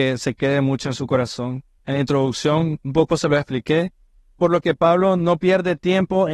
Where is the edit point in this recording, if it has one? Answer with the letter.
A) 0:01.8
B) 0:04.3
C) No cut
A